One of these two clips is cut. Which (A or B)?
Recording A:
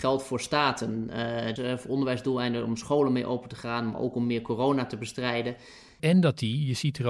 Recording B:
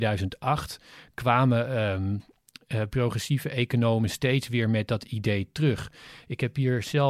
A